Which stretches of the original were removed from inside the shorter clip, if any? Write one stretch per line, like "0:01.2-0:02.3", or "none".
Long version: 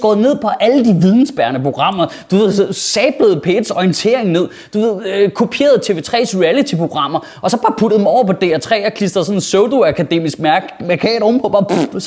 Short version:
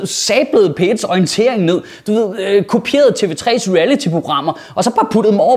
none